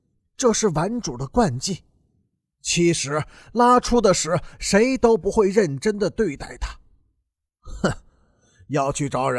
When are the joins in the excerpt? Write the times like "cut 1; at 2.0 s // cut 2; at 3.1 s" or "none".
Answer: none